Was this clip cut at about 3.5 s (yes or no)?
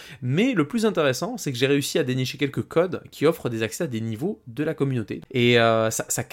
no